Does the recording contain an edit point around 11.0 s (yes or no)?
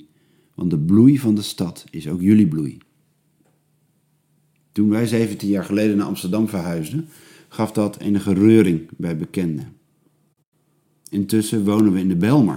no